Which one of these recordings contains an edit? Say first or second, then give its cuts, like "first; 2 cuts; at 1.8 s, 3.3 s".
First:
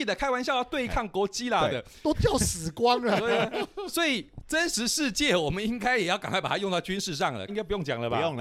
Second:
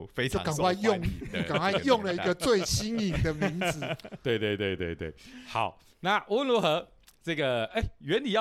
first; 1 cut; at 7.5 s